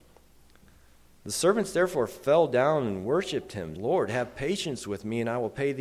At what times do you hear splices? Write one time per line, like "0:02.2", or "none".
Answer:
0:03.7

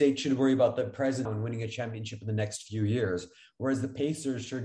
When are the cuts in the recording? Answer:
0:01.3

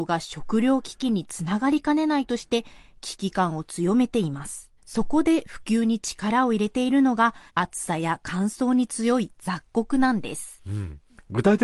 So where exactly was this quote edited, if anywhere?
0:04.8
0:07.5

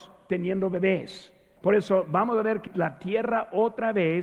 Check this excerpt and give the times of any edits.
0:01.6
0:02.7

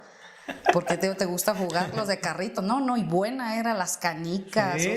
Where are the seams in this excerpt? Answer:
none

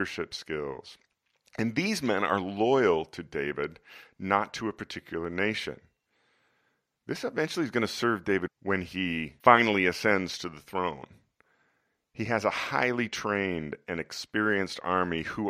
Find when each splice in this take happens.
0:08.5

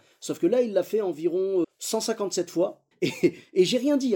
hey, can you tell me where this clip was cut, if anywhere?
0:01.6
0:02.9

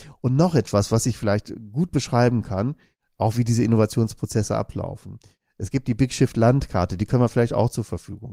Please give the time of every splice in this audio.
none

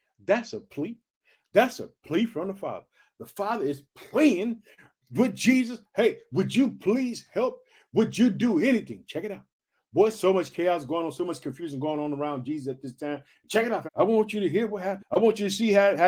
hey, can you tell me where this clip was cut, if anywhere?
0:13.9
0:15.0

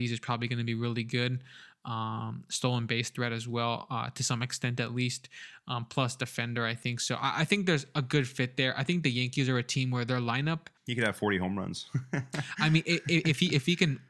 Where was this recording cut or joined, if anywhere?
0:10.8

